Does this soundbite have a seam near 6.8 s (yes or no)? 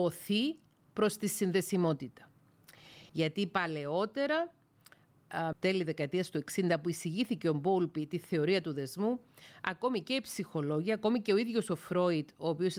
no